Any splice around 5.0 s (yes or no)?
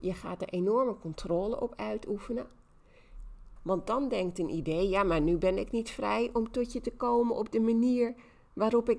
no